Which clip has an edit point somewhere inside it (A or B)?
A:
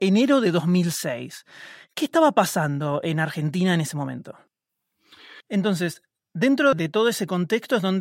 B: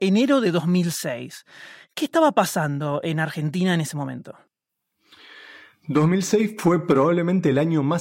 A